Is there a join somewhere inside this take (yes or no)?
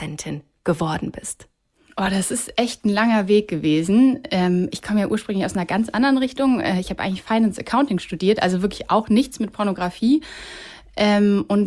no